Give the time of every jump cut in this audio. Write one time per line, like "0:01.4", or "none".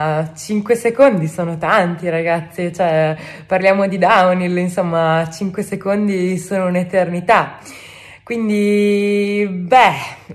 none